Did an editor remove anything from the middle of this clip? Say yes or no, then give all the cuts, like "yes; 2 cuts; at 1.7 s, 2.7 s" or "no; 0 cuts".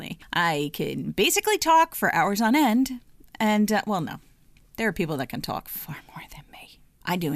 no; 0 cuts